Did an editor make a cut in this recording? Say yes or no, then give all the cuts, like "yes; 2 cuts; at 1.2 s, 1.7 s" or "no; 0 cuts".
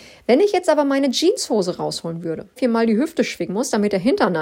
yes; 1 cut; at 2.6 s